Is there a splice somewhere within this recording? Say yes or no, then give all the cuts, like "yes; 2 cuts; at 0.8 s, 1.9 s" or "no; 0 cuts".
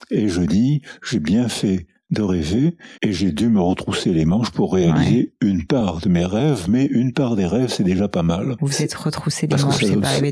yes; 2 cuts; at 3.0 s, 8.6 s